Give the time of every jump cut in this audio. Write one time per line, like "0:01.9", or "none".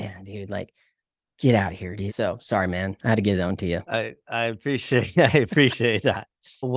0:02.1

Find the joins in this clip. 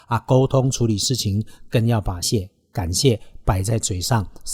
0:02.2

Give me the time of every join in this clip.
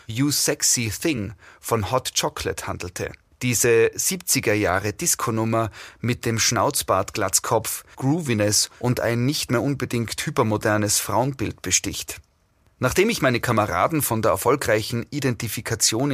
0:03.3
0:07.9

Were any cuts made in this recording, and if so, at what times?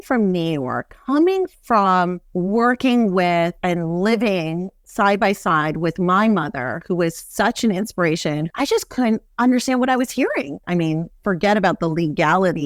0:08.5
0:10.6

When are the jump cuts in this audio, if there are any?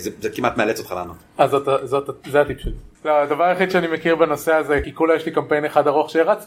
0:03.0
0:04.8

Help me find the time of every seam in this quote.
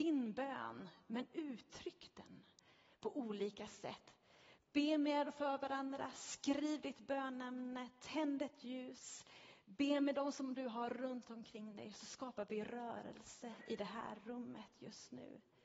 0:04.6

